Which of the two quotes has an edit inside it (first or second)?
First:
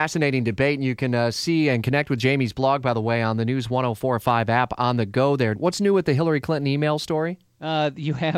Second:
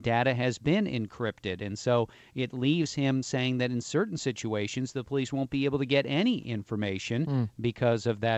first